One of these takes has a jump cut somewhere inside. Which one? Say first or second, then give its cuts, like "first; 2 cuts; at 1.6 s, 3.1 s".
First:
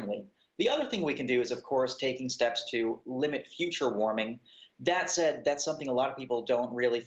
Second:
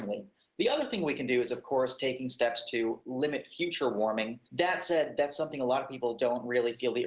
second; 1 cut; at 4.4 s